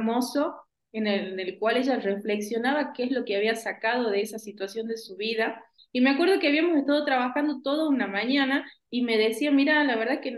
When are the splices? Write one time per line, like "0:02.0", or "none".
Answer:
0:05.8
0:08.9